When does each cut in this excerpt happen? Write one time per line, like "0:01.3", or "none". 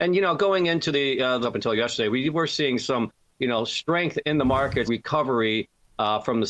0:01.4
0:04.9